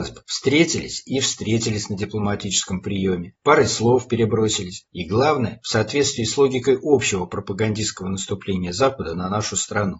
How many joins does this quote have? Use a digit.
1